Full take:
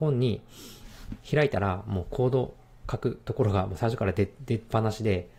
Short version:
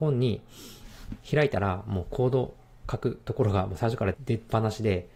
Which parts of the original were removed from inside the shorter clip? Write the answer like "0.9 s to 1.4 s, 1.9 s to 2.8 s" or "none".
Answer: 4.1 s to 4.3 s